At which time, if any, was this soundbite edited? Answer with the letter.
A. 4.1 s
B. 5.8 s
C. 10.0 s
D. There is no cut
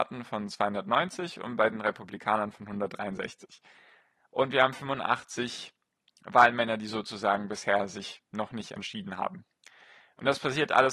D